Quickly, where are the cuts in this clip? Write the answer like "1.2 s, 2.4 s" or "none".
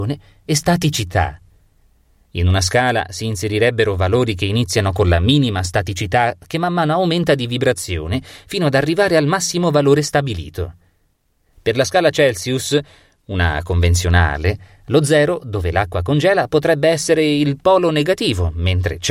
11.5 s